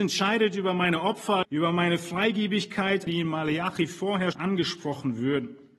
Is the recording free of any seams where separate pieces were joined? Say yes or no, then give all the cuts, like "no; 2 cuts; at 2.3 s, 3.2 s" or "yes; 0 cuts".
no; 3 cuts; at 1.4 s, 3.1 s, 4.3 s